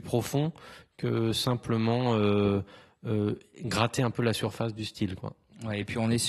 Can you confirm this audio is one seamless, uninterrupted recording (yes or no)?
yes